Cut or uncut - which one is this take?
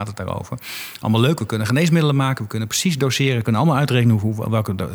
uncut